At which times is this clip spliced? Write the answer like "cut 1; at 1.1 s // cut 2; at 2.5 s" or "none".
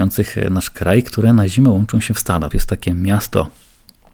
cut 1; at 2.5 s